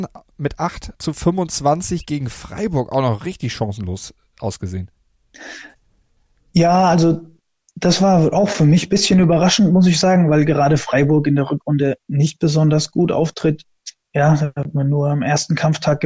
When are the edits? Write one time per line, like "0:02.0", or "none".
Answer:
none